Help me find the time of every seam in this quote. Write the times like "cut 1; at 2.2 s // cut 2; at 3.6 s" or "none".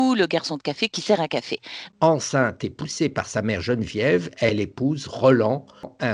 cut 1; at 1.9 s